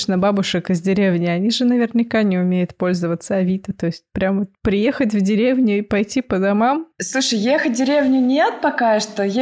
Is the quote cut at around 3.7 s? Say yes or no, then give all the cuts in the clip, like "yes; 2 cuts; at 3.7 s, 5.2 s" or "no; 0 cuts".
no; 0 cuts